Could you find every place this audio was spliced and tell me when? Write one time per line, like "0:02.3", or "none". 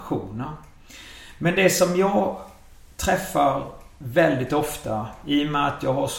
none